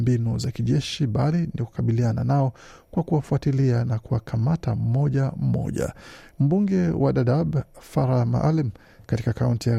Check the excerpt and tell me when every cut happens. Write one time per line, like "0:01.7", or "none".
0:06.3